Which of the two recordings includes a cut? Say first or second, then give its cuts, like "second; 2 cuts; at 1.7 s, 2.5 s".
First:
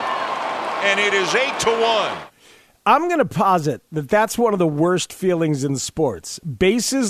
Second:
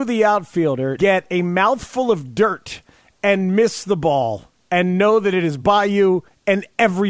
second; 1 cut; at 1.0 s